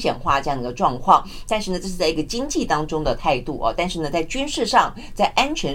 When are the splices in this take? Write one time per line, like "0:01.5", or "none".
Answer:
none